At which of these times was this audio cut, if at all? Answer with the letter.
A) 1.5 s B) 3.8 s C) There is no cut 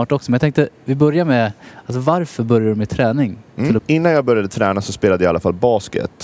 B